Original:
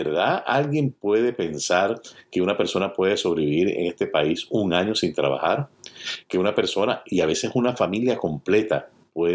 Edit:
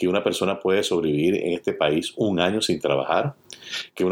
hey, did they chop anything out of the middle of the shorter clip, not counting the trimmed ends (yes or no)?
no